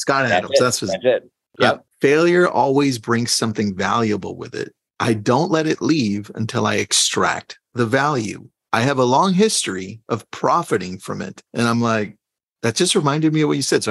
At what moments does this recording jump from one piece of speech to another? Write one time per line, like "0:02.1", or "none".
0:01.9
0:11.5